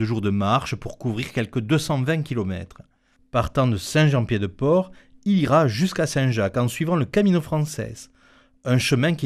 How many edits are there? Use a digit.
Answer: 1